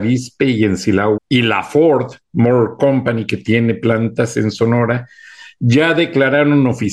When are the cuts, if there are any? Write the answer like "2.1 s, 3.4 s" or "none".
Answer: 1.2 s